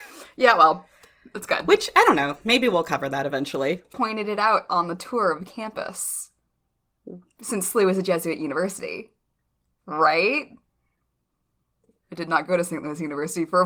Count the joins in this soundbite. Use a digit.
2